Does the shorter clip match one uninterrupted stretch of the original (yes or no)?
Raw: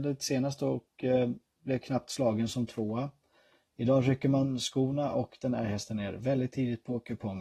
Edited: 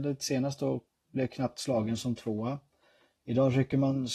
no